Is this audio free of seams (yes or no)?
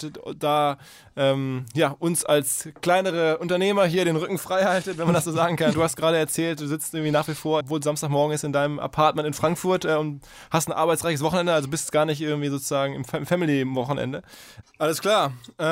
no